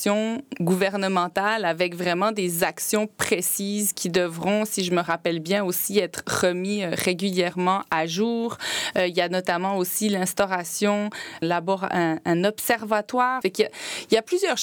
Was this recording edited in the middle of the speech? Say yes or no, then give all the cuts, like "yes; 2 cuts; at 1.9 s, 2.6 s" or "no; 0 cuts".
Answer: yes; 2 cuts; at 11.4 s, 13.4 s